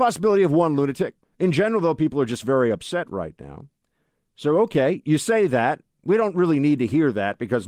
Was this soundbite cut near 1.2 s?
yes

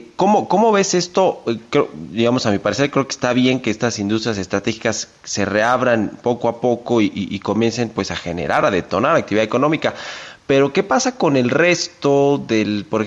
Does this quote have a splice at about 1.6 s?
no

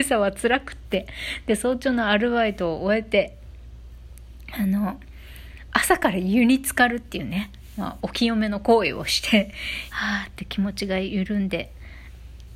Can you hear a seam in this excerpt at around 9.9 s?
yes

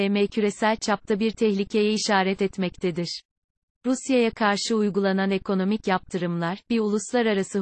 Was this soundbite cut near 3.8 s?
no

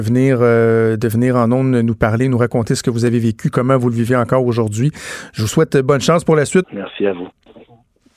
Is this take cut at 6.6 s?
yes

